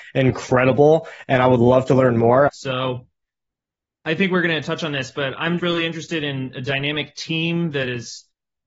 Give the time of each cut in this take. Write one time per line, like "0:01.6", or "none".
0:02.5
0:05.6